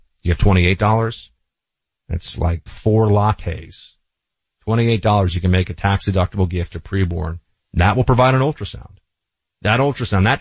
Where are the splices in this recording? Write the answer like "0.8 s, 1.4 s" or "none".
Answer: 2.7 s